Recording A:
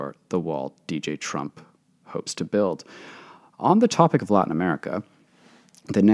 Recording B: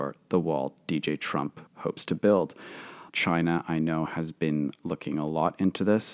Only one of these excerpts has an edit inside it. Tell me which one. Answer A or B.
B